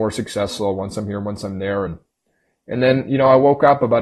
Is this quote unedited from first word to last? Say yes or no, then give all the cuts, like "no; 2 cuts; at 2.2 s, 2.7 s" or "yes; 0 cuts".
yes; 0 cuts